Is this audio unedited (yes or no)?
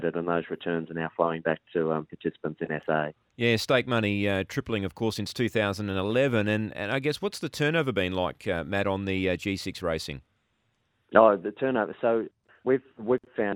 yes